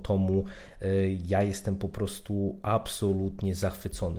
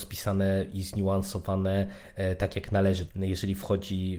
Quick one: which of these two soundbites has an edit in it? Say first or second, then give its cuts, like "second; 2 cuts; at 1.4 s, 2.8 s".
second; 1 cut; at 3.1 s